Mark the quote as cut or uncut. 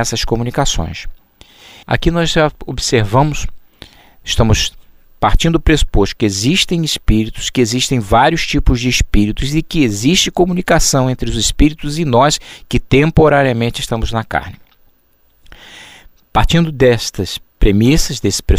cut